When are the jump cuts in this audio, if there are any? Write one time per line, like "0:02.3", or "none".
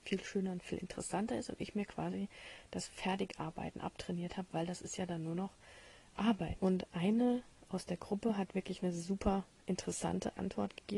0:06.6